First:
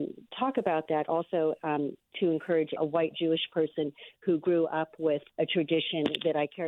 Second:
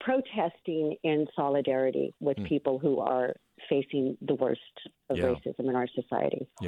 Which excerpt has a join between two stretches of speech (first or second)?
first